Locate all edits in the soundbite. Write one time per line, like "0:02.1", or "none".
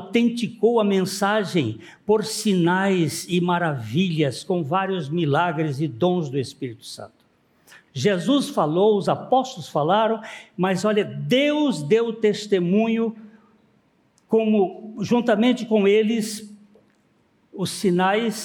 0:07.9